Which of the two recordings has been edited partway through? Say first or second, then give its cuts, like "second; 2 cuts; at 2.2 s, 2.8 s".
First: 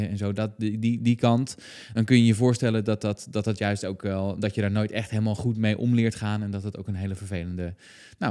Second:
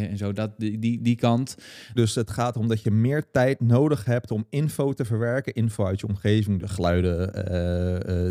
second; 2 cuts; at 2.0 s, 6.6 s